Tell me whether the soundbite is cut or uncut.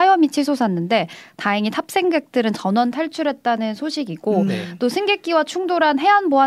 uncut